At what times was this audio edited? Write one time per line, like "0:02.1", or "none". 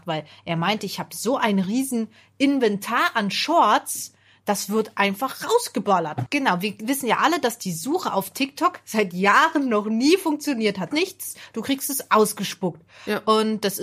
0:06.3
0:10.9